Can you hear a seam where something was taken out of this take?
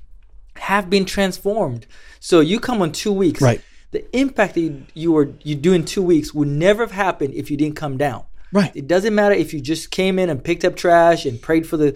yes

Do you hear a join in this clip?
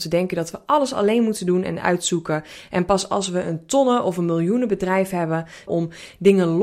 yes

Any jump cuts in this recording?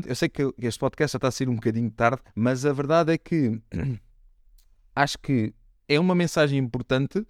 yes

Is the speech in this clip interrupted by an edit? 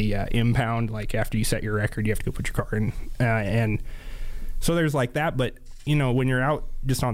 no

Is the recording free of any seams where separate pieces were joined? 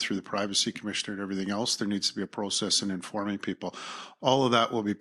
yes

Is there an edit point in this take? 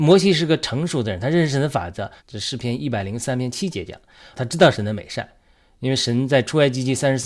yes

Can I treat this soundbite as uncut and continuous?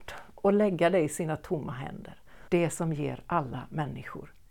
no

